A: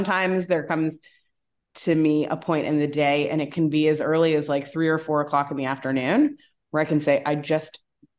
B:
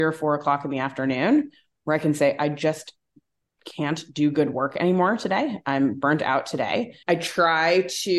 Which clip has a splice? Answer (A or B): B